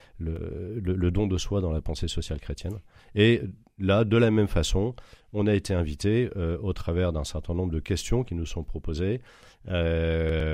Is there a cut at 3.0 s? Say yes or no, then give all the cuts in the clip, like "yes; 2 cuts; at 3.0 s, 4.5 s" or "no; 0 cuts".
yes; 1 cut; at 3.0 s